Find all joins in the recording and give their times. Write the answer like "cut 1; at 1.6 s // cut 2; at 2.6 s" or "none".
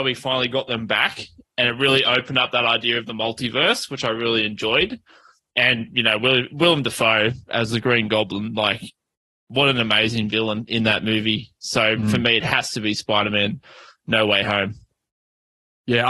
none